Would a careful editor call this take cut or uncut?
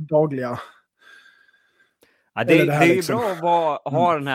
uncut